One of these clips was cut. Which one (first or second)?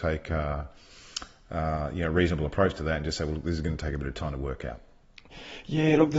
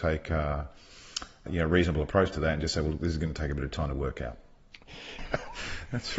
second